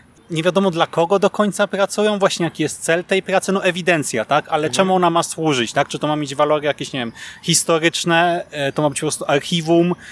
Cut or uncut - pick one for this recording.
uncut